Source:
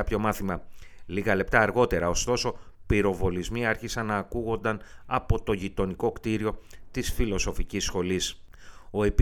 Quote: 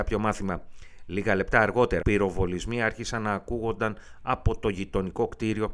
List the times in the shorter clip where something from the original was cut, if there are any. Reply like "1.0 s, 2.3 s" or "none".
2.0 s